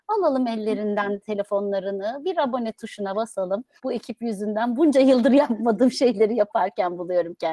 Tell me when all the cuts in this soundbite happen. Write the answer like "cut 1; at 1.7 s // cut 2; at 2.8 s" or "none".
cut 1; at 3.8 s